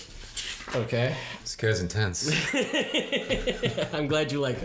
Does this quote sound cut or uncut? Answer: uncut